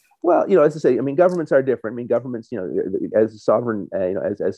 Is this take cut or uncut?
uncut